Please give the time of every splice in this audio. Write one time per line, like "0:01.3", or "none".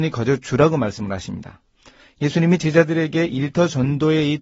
none